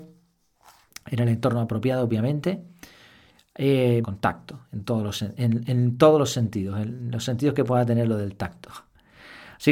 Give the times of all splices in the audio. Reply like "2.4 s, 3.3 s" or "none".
4.0 s